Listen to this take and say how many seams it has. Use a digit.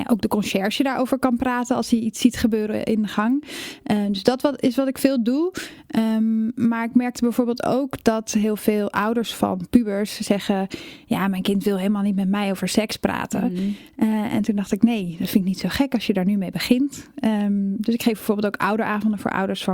0